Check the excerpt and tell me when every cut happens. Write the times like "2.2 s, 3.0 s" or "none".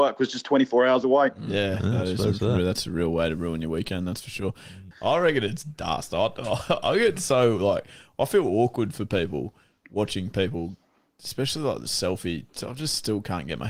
4.9 s